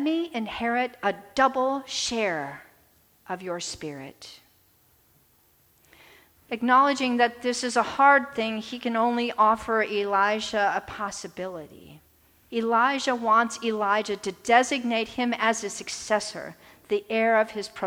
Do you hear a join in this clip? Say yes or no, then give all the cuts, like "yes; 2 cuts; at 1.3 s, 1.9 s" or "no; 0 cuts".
yes; 2 cuts; at 6.4 s, 12.5 s